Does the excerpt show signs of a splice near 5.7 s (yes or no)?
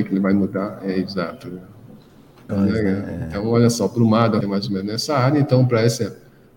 no